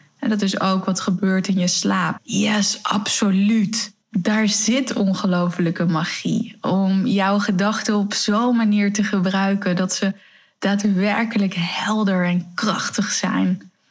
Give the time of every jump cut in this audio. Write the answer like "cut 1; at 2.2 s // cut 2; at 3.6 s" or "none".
cut 1; at 2.2 s // cut 2; at 4.0 s